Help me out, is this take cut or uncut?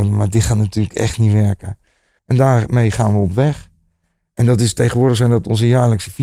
cut